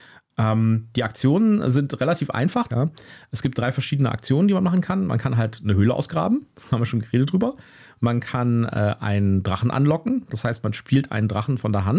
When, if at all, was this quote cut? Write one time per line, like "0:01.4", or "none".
0:02.7